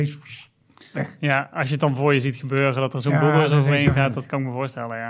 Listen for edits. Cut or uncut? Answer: uncut